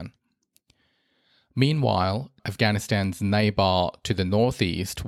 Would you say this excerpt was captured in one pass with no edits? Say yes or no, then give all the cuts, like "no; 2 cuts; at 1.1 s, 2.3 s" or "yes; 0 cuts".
no; 1 cut; at 2.4 s